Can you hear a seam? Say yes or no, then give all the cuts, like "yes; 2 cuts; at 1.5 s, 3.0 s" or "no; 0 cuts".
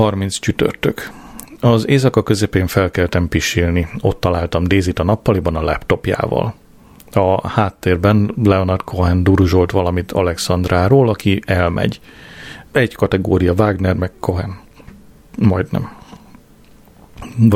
yes; 1 cut; at 12.7 s